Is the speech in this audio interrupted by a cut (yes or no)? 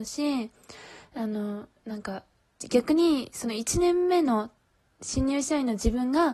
yes